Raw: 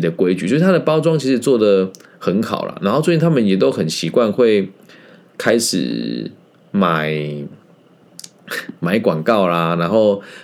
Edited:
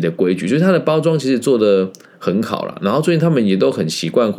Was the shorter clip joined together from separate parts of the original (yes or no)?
no